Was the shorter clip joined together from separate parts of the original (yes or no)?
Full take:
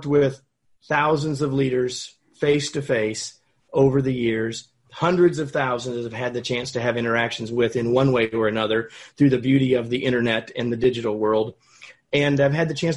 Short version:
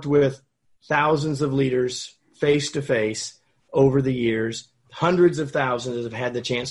no